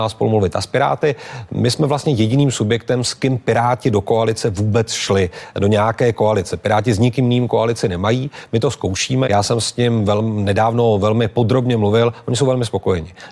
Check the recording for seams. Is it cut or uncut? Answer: cut